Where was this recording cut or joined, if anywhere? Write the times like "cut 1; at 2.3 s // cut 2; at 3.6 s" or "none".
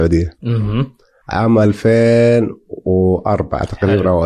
cut 1; at 1.2 s